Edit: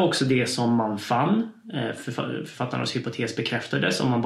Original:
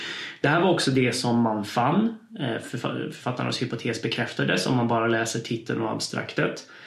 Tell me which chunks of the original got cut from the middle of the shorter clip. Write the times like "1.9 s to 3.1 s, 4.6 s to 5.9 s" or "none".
none